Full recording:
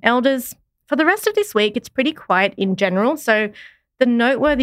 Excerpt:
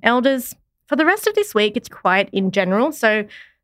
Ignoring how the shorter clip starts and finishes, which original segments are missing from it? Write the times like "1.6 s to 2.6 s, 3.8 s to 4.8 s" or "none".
1.9 s to 2.1 s